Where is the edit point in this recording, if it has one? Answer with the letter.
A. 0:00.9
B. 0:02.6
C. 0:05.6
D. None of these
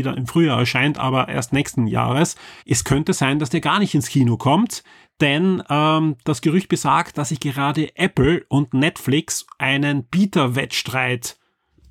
B